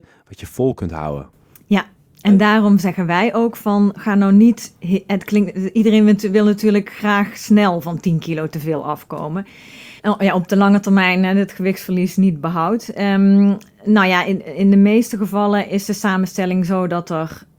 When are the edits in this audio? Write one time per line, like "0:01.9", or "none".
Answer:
0:10.0